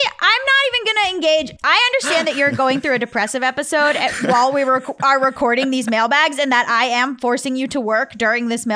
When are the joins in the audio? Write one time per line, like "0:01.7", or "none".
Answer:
0:01.6